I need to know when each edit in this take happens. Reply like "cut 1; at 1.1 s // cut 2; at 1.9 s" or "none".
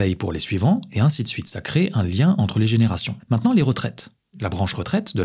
cut 1; at 3.2 s